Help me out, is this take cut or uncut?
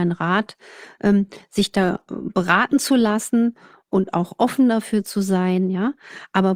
uncut